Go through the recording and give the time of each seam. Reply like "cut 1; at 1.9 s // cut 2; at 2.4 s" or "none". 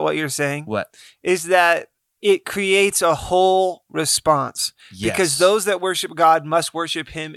none